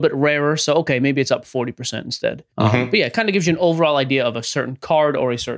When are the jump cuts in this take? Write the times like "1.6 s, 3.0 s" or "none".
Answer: 2.5 s